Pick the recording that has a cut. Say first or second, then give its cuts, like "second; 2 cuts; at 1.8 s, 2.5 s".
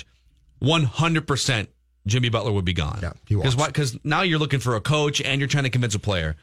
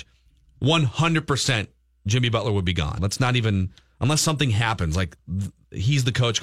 second; 1 cut; at 3.0 s